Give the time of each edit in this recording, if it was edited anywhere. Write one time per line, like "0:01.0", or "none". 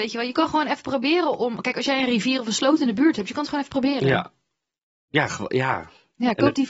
none